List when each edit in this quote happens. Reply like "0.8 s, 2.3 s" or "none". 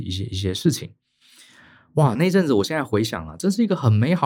2.2 s